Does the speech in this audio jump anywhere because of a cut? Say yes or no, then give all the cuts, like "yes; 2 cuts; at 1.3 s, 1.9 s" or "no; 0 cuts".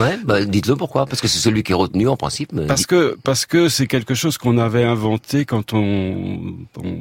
no; 0 cuts